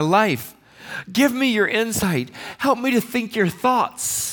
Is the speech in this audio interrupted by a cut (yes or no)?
yes